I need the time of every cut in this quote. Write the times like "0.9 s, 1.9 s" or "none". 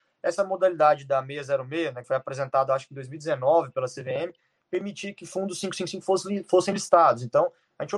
2.0 s